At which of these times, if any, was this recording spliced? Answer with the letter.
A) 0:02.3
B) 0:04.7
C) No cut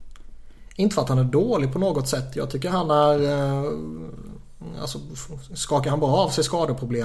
C